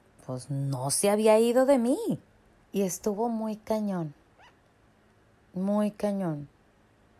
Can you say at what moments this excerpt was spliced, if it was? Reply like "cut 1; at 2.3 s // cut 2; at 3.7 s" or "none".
cut 1; at 2.6 s